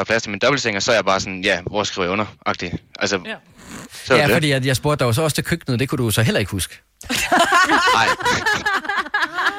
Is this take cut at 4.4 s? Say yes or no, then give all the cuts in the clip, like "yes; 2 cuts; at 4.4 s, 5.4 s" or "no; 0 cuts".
no; 0 cuts